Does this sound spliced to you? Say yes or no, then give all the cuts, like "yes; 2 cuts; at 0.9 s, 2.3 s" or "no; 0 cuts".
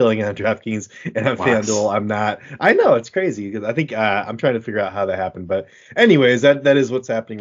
no; 0 cuts